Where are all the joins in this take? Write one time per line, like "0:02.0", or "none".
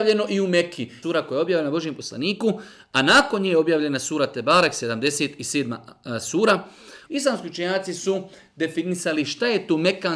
0:01.0
0:07.1